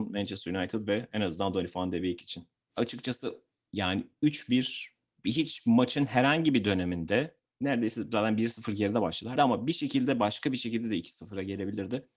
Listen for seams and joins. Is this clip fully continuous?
no; 2 cuts; at 2.7 s, 9.4 s

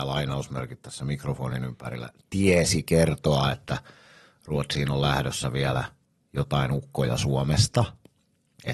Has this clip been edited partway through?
no; 0 cuts

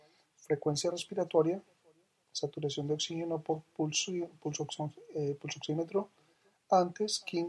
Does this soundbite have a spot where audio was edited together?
no; 0 cuts

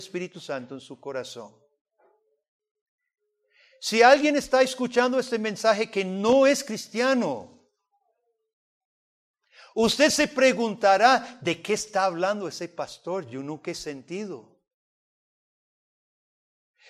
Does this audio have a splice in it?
no; 0 cuts

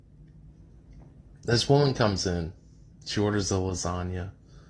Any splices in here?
no; 0 cuts

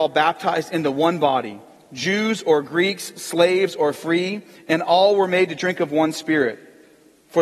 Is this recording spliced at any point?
no; 0 cuts

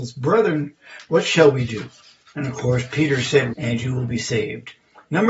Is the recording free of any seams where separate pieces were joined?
no; 1 cut; at 3.5 s

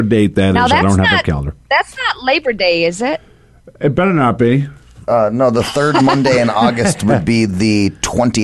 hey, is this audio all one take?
yes; 0 cuts

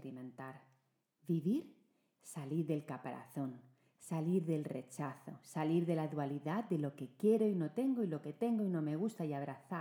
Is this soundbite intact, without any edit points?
yes; 0 cuts

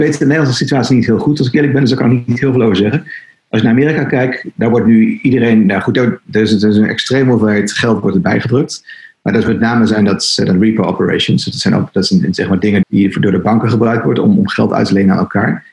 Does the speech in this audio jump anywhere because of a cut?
yes; 1 cut; at 12.8 s

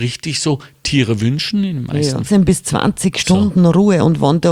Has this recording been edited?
yes; 1 cut; at 2.3 s

